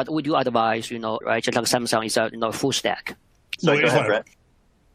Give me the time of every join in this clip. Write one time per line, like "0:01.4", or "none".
0:01.2
0:03.6

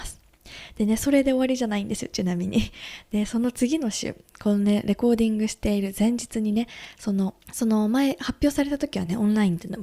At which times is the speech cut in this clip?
0:07.4

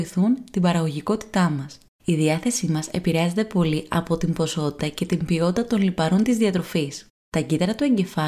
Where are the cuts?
0:01.9

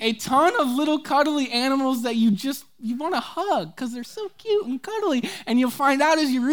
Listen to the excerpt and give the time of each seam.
none

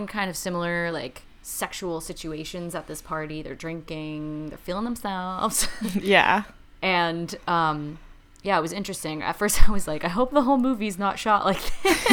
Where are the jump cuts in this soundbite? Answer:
none

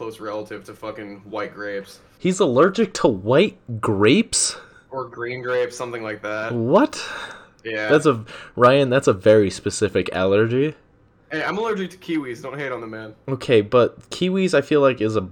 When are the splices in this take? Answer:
none

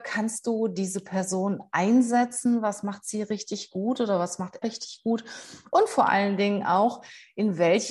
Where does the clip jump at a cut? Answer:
0:04.6

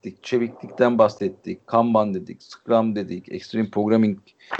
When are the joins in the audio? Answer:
none

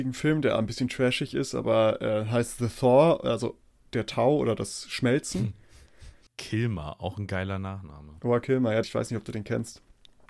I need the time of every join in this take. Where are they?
0:06.3
0:08.8

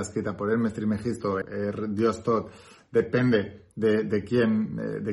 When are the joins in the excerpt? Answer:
0:01.4

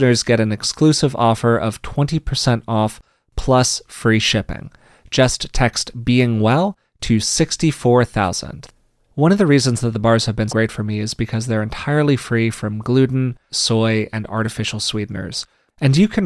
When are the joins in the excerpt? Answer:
0:10.5
0:13.5

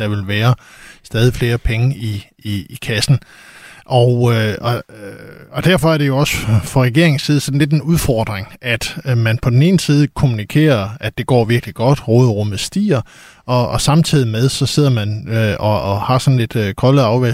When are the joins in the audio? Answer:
none

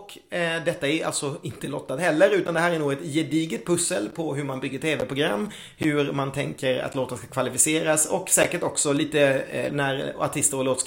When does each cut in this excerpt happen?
0:09.7

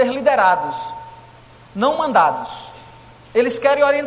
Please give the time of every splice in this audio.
none

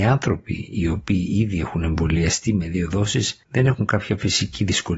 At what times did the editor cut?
0:03.4

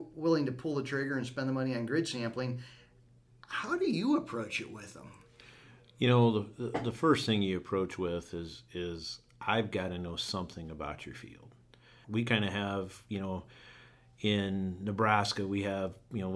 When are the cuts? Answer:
0:12.0

